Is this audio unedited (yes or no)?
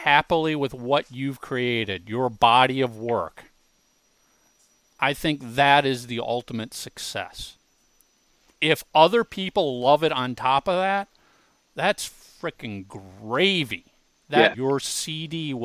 no